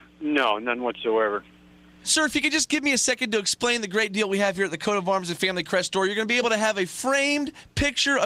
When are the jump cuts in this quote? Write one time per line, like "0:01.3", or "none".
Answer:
none